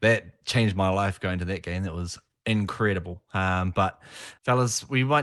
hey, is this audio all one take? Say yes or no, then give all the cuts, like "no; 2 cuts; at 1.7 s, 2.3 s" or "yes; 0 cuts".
yes; 0 cuts